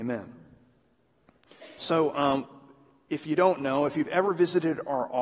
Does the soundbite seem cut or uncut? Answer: uncut